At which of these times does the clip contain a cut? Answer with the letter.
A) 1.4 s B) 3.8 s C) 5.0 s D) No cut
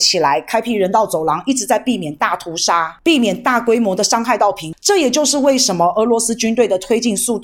D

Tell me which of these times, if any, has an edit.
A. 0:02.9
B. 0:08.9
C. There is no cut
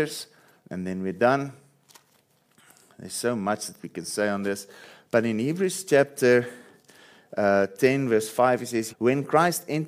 B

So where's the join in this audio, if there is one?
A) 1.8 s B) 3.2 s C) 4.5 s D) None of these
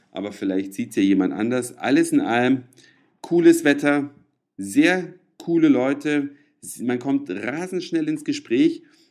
D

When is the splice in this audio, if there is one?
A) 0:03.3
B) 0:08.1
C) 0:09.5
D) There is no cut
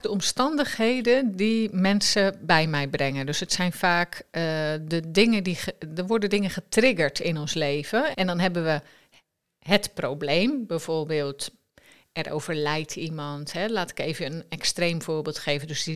B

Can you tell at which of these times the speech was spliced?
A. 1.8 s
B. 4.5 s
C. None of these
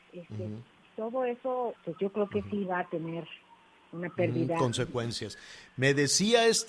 A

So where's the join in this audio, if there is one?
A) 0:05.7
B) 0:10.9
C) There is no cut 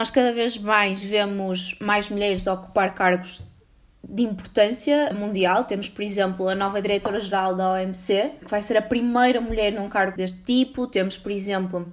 C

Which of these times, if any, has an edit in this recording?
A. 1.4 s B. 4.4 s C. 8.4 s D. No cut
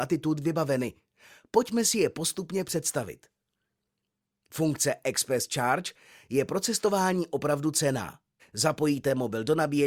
C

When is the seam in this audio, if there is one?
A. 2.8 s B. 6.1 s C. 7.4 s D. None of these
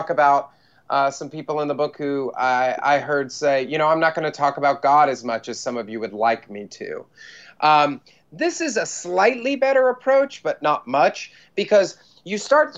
D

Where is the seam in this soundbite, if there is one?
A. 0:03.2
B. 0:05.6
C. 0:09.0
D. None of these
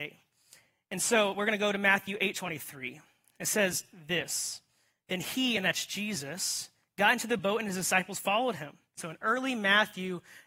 C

